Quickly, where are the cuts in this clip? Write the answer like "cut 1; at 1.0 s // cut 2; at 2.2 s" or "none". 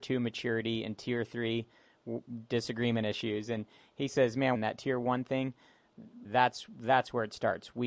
cut 1; at 4.5 s // cut 2; at 6.2 s